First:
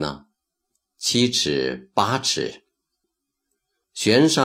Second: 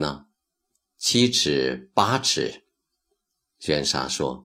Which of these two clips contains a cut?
first; 1 cut; at 3.0 s

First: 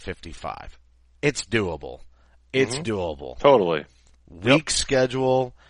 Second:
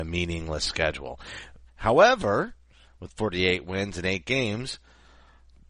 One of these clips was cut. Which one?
second; 1 cut; at 1.7 s

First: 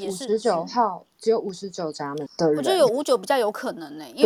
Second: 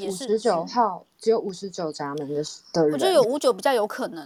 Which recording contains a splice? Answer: first; 1 cut; at 2.3 s

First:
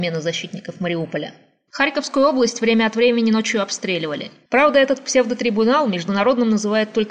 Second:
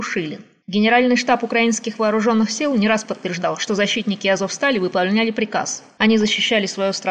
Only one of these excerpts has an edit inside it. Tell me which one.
first; 2 cuts; at 1.7 s, 4.4 s

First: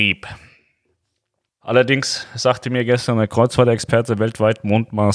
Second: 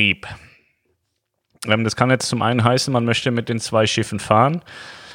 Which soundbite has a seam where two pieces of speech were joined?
first; 1 cut; at 1.5 s

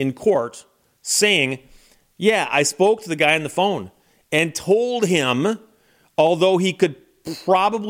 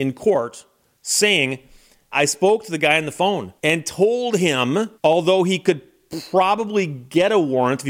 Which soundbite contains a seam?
second; 3 cuts; at 2.1 s, 3.6 s, 5.0 s

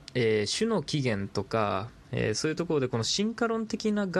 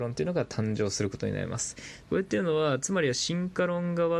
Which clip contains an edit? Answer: second; 1 cut; at 2.0 s

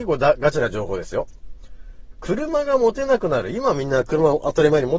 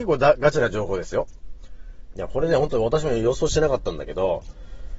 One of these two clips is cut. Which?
second; 1 cut; at 2.1 s

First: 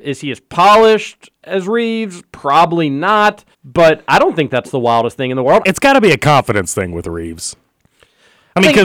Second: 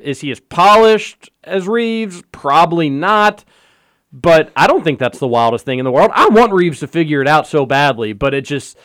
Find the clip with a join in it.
first; 2 cuts; at 3.5 s, 5.6 s

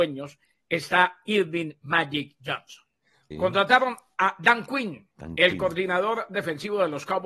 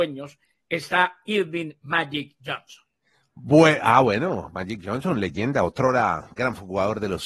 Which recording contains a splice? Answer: first; 2 cuts; at 3.3 s, 5.1 s

